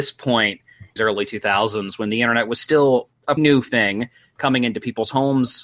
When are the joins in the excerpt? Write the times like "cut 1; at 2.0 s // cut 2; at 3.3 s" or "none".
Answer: cut 1; at 1.0 s // cut 2; at 3.4 s